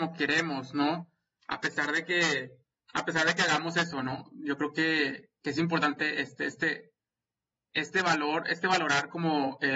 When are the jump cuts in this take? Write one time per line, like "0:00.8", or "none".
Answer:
none